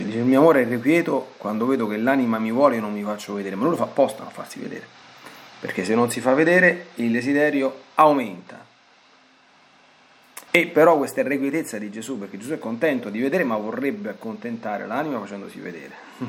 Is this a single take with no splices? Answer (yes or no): no